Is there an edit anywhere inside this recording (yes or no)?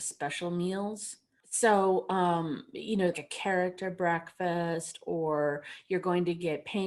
yes